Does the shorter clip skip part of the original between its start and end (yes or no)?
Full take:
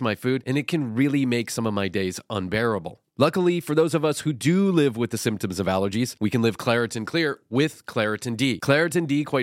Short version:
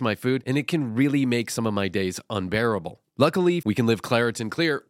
yes